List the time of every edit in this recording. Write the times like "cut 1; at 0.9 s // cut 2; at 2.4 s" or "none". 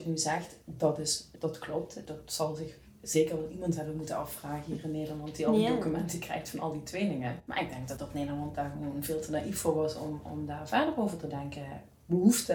none